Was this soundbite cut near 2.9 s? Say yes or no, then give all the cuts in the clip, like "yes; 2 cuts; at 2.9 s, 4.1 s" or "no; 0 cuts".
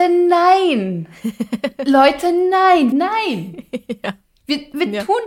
yes; 1 cut; at 2.9 s